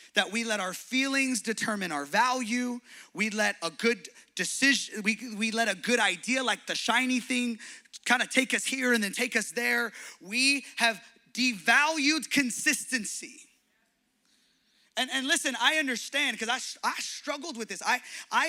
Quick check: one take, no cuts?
yes; 0 cuts

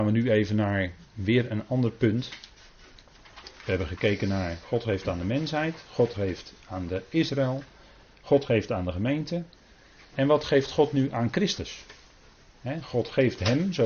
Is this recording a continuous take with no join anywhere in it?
yes; 0 cuts

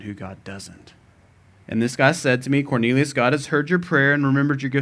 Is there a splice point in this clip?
yes; 1 cut; at 1.6 s

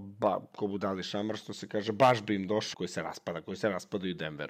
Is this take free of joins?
no; 1 cut; at 2.7 s

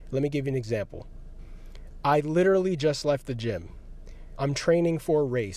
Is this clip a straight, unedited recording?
no; 1 cut; at 4.4 s

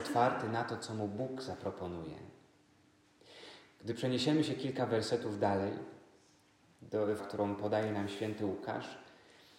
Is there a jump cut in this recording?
yes; 1 cut; at 7.2 s

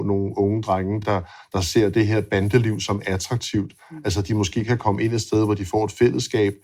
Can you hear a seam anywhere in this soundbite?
no; 0 cuts

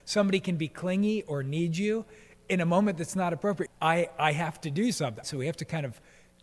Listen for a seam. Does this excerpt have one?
yes; 2 cuts; at 3.7 s, 5.2 s

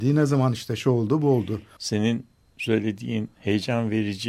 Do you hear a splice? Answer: yes; 1 cut; at 1.8 s

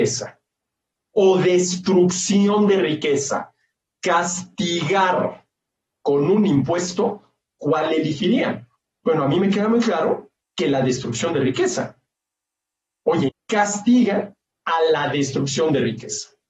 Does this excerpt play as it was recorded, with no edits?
no; 1 cut; at 13.3 s

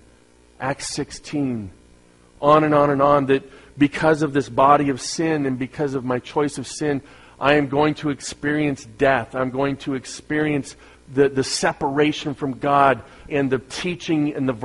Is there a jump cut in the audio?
yes; 2 cuts; at 11.0 s, 13.3 s

